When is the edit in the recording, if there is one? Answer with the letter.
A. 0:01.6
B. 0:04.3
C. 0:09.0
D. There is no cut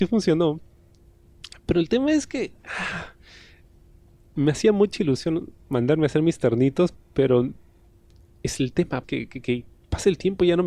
C